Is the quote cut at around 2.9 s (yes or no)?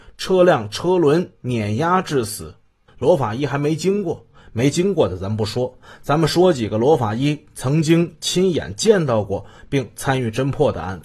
yes